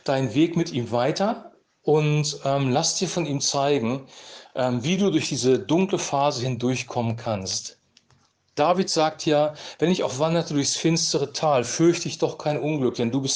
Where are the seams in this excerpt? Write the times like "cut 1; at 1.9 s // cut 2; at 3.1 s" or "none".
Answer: none